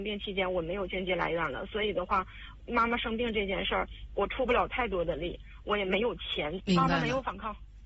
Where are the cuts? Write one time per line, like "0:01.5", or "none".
0:06.6